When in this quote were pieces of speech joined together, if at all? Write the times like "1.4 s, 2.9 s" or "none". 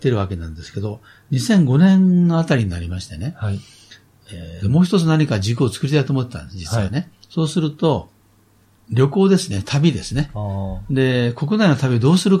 4.6 s